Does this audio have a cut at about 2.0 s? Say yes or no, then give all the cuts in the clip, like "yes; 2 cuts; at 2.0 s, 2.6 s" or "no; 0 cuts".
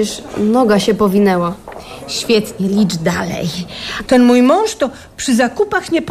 no; 1 cut; at 4.1 s